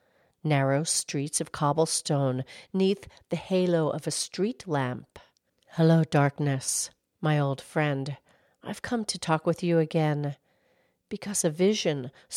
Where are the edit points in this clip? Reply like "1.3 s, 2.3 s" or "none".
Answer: 5.5 s